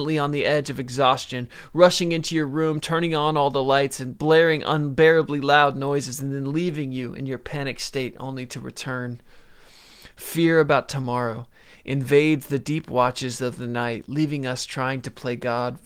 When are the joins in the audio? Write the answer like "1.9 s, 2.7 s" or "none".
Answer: none